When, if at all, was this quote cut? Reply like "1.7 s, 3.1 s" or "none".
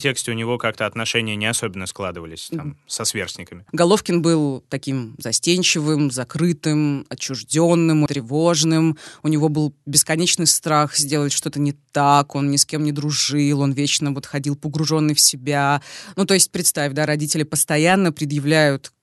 3.7 s, 8.1 s